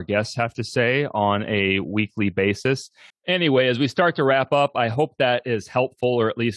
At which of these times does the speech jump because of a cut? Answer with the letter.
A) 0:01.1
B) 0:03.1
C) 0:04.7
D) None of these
B